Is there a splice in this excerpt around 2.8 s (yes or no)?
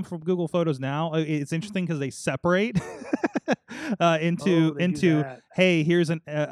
no